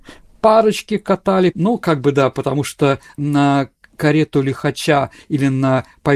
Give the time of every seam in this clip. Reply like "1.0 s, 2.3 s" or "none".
1.5 s